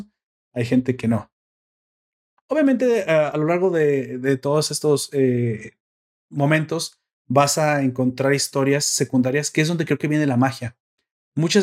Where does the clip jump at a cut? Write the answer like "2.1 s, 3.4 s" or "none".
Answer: none